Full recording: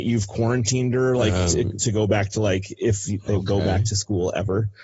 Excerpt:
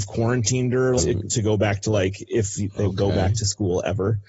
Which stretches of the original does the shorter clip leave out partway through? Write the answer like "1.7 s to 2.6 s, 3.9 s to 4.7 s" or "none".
1.2 s to 1.5 s